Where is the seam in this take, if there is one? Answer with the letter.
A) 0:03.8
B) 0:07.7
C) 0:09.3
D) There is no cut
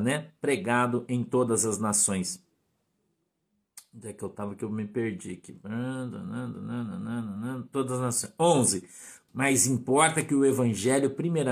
C